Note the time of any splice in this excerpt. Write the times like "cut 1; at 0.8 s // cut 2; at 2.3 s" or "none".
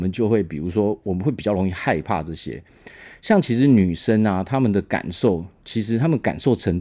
none